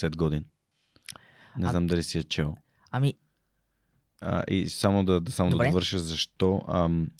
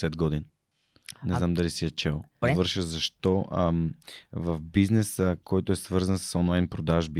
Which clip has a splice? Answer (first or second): second